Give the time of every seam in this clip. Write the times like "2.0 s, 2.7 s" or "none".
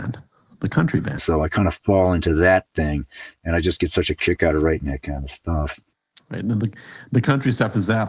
1.2 s